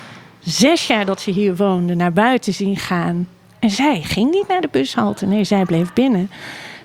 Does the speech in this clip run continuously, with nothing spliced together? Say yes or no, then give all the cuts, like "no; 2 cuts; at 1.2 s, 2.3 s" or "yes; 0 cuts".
yes; 0 cuts